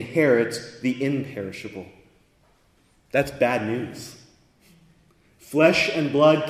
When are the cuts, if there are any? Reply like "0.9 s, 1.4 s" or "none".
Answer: none